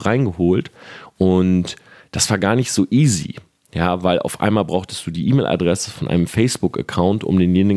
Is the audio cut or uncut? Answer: uncut